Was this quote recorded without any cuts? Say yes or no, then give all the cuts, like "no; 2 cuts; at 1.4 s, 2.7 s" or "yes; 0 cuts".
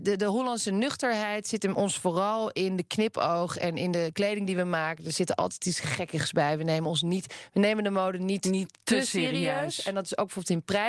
yes; 0 cuts